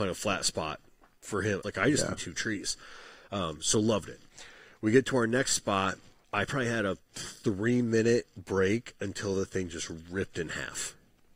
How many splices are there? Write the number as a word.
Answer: three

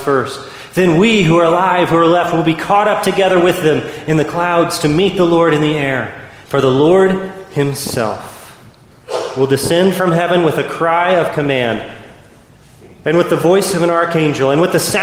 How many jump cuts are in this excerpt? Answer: one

